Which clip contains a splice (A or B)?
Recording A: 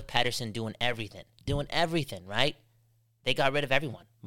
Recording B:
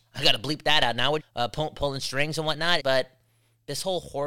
B